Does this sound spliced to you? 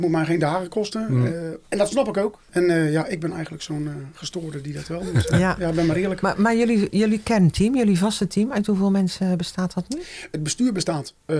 no; 0 cuts

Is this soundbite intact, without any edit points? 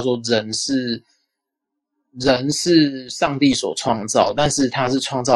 yes; 0 cuts

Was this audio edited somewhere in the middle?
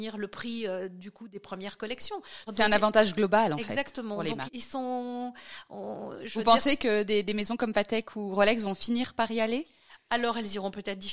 yes; 2 cuts; at 2.5 s, 4.5 s

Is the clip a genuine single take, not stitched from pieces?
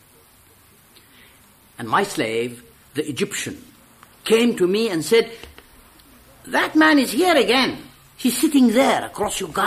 yes; 0 cuts

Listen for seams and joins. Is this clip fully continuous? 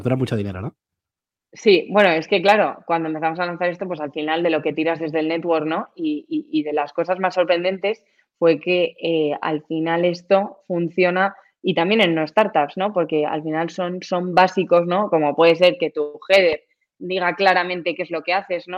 yes; 0 cuts

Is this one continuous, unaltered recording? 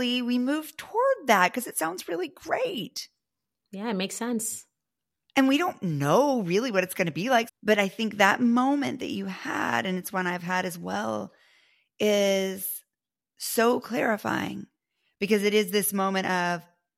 no; 1 cut; at 7.5 s

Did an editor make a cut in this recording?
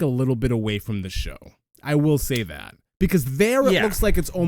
no; 0 cuts

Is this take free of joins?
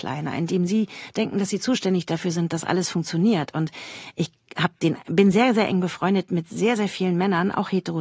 yes; 0 cuts

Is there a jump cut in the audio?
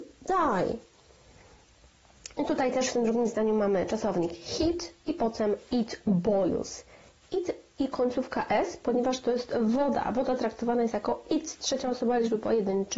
no; 0 cuts

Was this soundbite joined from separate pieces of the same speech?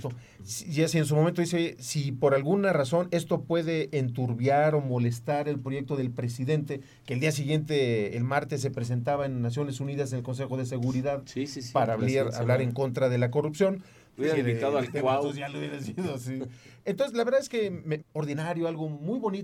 yes; 2 cuts; at 14.2 s, 18.0 s

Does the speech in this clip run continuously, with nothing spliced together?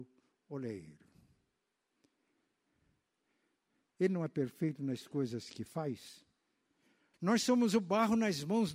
no; 2 cuts; at 3.9 s, 7.1 s

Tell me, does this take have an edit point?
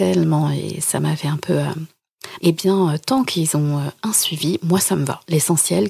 yes; 1 cut; at 2.4 s

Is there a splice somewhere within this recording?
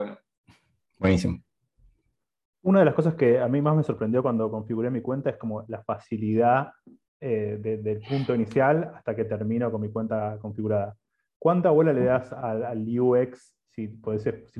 no; 0 cuts

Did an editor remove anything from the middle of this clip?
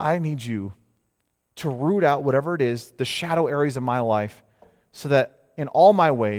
no; 0 cuts

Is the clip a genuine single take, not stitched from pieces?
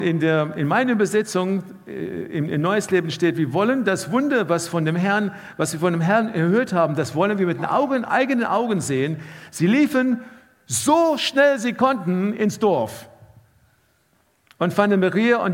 yes; 0 cuts

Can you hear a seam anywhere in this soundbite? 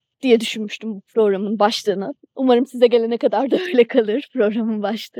no; 0 cuts

